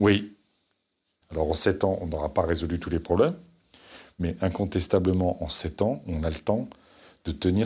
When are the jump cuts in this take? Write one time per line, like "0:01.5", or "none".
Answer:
0:01.2